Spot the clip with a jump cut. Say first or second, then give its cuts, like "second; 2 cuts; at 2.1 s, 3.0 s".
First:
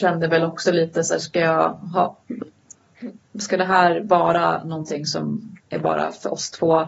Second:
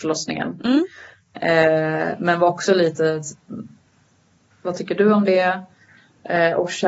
second; 1 cut; at 4.5 s